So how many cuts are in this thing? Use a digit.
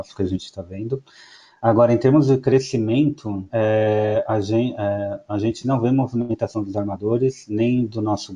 1